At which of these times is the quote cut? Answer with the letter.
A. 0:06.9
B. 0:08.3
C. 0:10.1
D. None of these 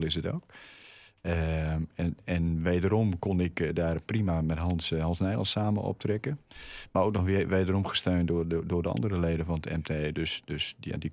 D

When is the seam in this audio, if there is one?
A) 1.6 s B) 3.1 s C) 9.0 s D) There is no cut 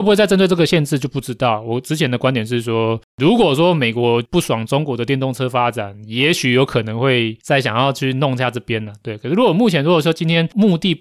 D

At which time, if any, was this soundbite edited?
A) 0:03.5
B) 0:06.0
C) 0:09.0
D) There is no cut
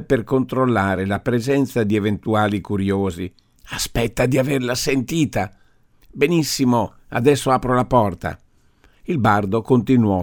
A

